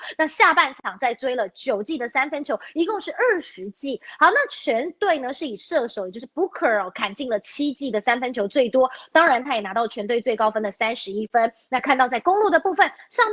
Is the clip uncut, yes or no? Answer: yes